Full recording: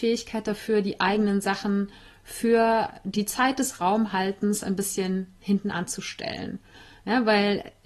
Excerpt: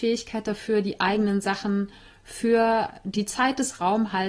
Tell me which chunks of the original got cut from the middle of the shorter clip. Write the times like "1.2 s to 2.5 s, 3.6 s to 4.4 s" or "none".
none